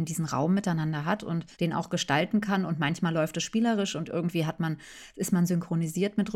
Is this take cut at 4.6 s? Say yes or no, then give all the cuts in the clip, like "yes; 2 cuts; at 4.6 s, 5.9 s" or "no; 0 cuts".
no; 1 cut; at 1.5 s